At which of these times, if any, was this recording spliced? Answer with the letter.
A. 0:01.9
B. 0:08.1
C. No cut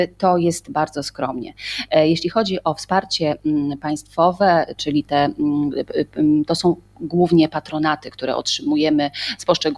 C